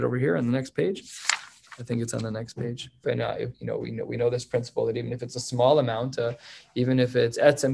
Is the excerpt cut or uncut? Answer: cut